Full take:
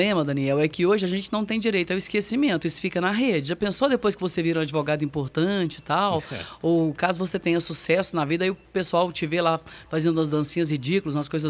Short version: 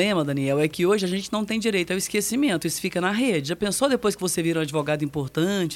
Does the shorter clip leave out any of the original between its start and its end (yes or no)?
no